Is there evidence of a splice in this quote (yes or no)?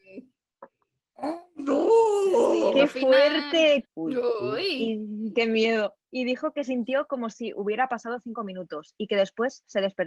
yes